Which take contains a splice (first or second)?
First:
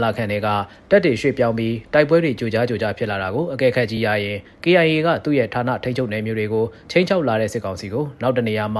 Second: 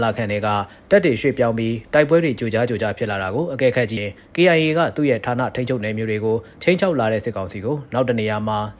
second